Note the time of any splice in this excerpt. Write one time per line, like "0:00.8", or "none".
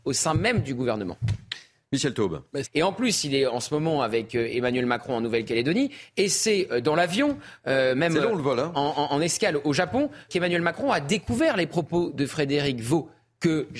0:02.6
0:10.3